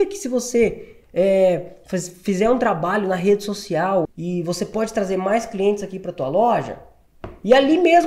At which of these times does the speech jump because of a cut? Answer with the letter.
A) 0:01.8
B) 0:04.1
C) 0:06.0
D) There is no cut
B